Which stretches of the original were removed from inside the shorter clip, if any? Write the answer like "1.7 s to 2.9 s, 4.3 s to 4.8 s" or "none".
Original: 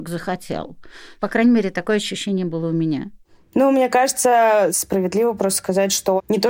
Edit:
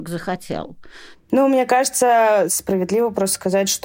1.1 s to 3.4 s